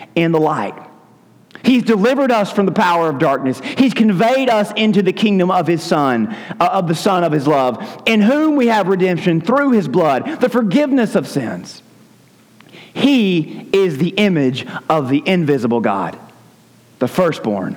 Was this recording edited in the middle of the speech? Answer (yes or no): no